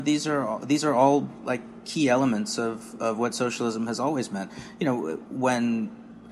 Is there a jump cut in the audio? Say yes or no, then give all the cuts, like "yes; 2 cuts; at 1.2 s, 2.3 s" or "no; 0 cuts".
yes; 1 cut; at 5.3 s